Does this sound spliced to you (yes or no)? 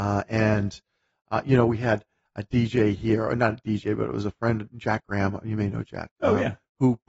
no